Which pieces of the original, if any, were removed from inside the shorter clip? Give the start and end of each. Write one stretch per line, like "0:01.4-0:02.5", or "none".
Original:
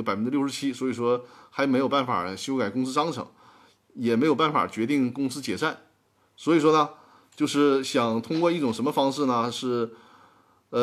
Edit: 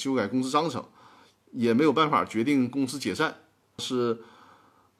0:06.2-0:09.5